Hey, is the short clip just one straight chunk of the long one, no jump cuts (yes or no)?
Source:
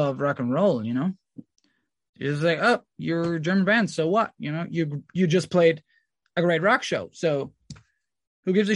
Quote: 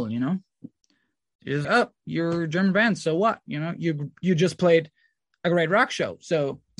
no